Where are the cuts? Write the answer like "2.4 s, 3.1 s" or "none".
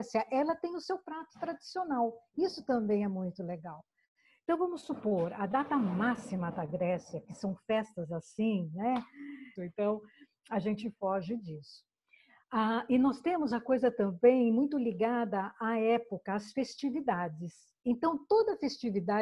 9.6 s